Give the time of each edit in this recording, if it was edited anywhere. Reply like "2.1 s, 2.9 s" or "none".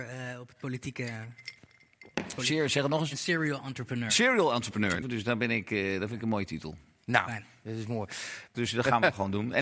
5.0 s, 8.5 s

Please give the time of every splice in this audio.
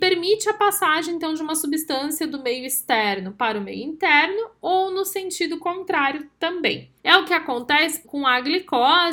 7.0 s, 8.0 s

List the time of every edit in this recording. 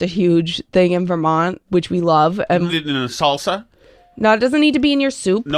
1.7 s, 2.7 s

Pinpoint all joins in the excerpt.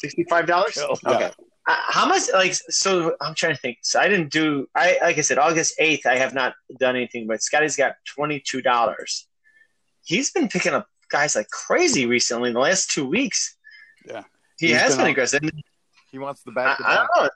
1.6 s, 14.0 s

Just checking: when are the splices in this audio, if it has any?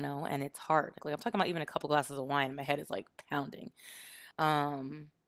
1.0 s, 4.3 s

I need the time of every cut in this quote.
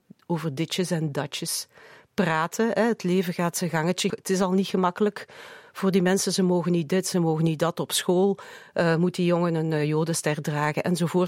4.1 s

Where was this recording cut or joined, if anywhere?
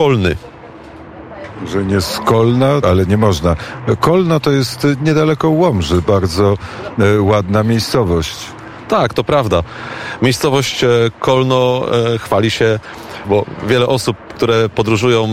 2.8 s, 13.2 s

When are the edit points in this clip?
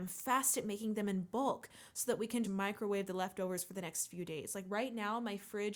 2.4 s

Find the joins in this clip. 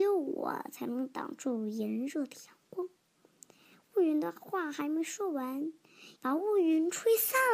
6.2 s

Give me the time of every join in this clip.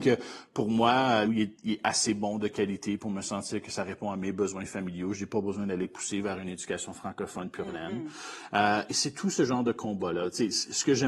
1.2 s, 8.9 s

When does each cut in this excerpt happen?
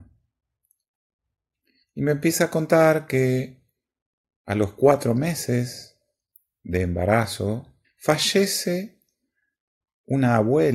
1.8 s, 7.8 s

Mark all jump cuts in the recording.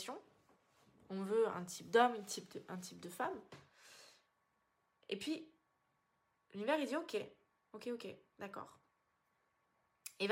none

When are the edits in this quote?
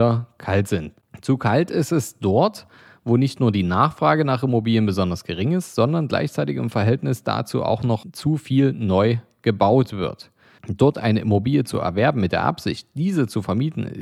10.6 s

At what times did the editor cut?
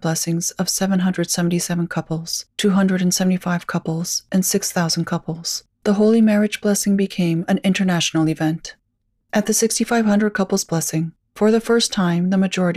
2.5 s, 11.3 s

